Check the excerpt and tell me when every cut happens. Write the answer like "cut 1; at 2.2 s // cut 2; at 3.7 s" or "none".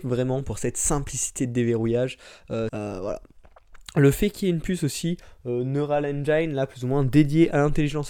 cut 1; at 2.7 s

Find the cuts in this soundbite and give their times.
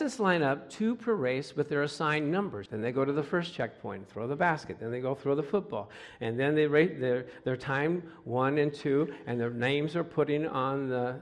cut 1; at 2.7 s

